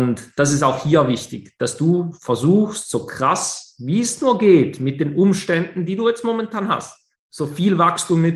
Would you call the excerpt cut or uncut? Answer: cut